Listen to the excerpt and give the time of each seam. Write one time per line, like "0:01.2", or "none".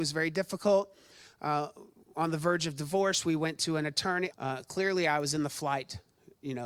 0:04.3